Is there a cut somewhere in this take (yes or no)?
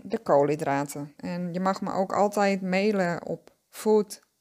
yes